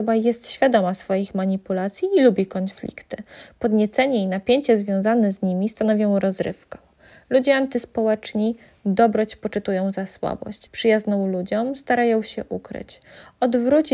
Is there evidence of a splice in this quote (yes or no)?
yes